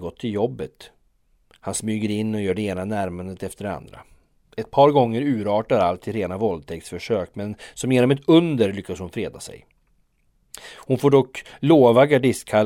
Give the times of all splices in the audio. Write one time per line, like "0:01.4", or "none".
none